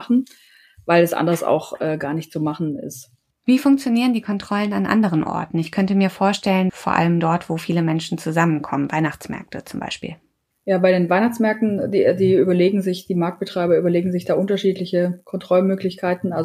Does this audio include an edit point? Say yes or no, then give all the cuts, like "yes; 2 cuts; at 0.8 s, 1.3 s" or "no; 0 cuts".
yes; 1 cut; at 6.7 s